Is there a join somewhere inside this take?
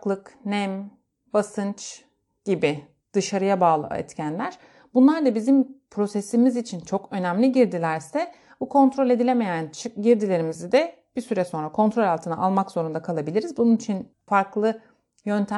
no; 0 cuts

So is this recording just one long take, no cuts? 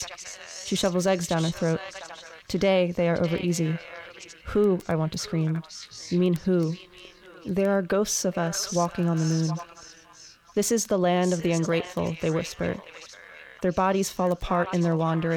no; 1 cut; at 13.6 s

